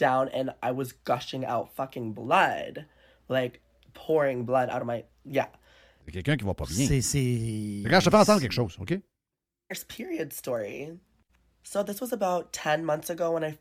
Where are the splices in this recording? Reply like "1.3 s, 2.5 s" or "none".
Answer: 6.0 s